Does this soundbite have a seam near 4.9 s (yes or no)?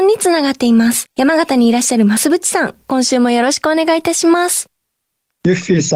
no